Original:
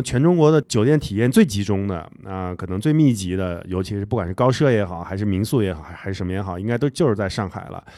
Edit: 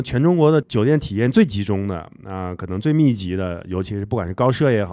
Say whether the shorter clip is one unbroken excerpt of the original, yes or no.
yes